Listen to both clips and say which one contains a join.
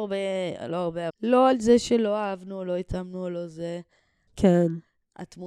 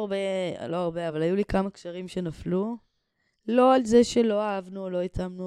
first; 2 cuts; at 1.1 s, 4.3 s

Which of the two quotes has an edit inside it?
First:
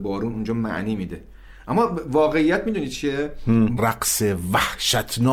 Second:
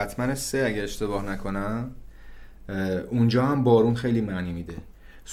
first; 1 cut; at 3.8 s

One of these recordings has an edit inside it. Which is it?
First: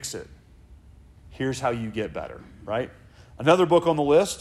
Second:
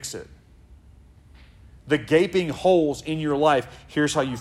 first; 1 cut; at 1.2 s

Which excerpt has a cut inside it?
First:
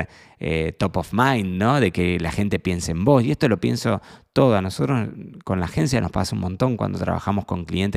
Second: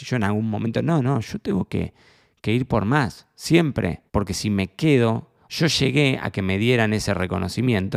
second; 2 cuts; at 4.1 s, 5.5 s

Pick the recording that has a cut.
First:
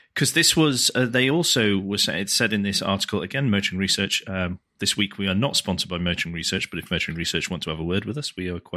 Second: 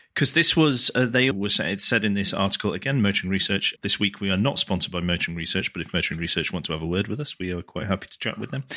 second; 2 cuts; at 1.3 s, 3.8 s

